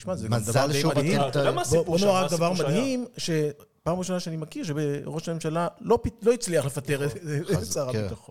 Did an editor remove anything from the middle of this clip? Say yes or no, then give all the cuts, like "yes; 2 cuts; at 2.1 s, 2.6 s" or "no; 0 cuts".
no; 0 cuts